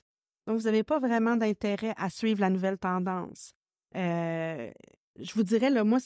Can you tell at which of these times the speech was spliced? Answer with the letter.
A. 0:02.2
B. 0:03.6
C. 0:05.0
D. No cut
C